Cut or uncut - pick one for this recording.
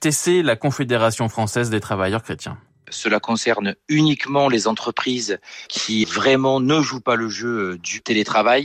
cut